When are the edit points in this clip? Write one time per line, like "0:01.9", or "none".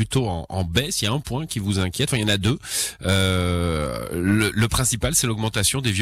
none